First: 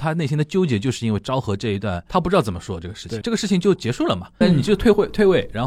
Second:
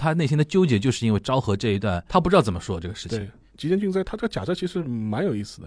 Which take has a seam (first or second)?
first